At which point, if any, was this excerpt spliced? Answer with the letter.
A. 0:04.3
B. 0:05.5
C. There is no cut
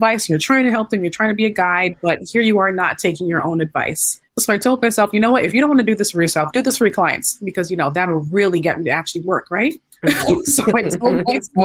A